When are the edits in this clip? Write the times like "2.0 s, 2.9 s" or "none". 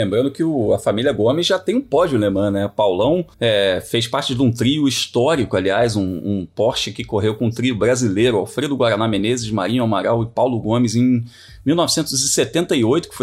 3.3 s

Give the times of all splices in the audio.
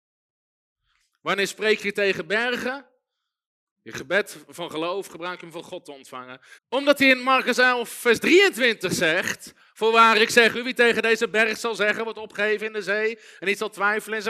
3.7 s, 6.6 s

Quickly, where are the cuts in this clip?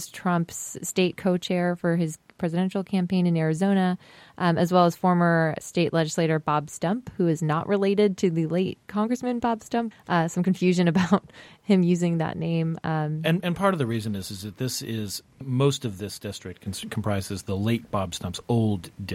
9.9 s

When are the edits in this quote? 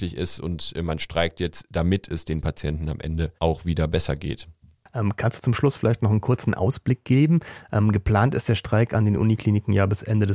3.4 s

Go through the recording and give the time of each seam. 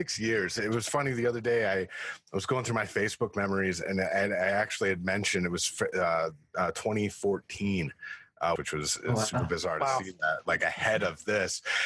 6.4 s, 8.6 s

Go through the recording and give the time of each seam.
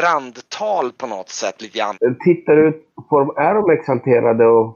1.9 s

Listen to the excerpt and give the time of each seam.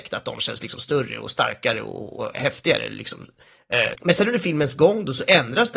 3.9 s

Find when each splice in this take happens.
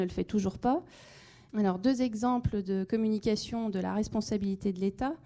1.5 s

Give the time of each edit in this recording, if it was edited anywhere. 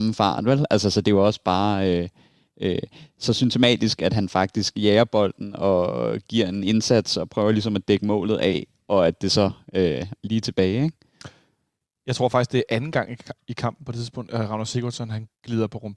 10.2 s

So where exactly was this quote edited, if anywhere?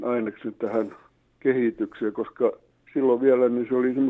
none

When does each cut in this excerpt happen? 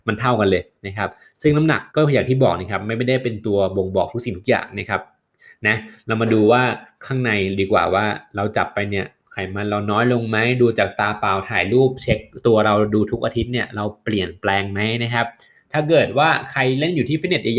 1.9 s

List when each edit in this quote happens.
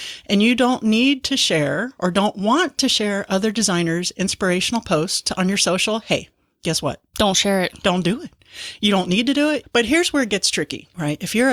9.6 s

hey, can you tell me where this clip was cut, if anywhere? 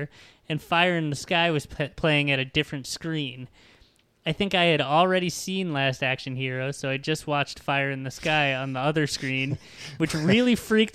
none

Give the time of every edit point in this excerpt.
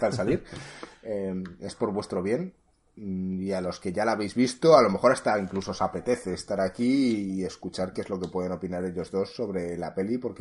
none

